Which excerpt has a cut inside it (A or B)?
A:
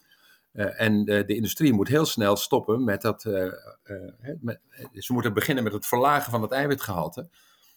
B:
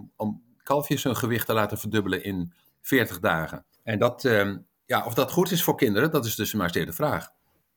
B